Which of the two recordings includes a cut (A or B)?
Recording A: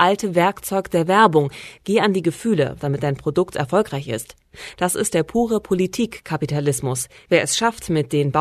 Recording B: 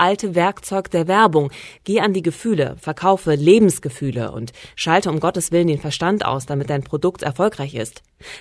A